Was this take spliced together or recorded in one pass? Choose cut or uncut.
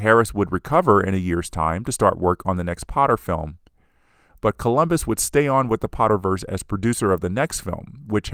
cut